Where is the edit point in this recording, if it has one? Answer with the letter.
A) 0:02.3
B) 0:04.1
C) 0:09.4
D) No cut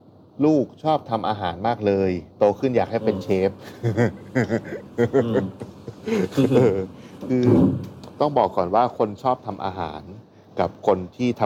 A